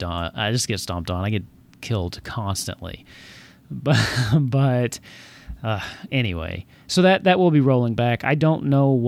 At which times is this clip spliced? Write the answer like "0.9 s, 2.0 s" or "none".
none

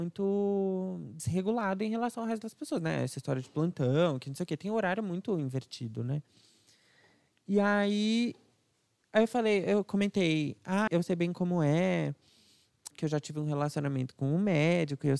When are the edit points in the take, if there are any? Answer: 10.9 s, 12.9 s

